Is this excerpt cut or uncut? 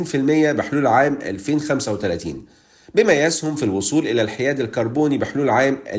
uncut